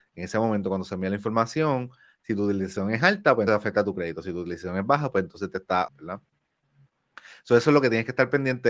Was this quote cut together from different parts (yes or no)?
yes